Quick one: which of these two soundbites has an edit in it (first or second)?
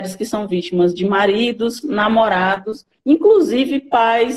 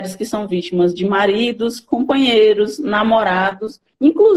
first